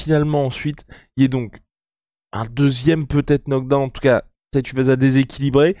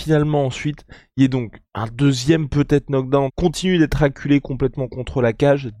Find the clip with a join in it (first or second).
second